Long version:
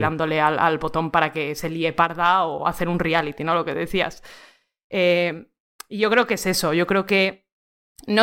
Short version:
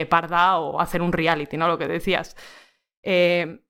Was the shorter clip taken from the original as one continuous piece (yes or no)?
yes